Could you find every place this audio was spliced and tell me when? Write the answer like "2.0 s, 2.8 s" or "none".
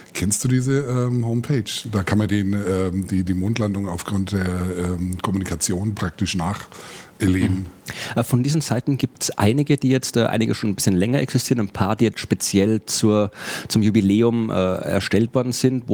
none